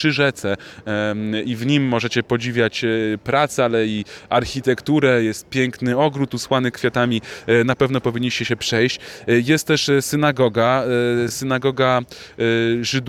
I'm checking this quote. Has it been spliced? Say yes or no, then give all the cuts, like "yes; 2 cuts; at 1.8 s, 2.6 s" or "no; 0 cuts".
no; 0 cuts